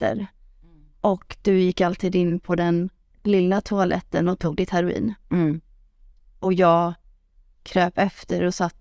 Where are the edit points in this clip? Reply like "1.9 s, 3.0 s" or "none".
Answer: none